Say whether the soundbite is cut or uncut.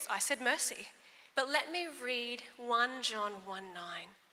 cut